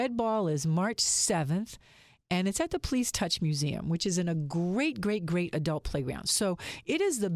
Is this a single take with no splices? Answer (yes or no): yes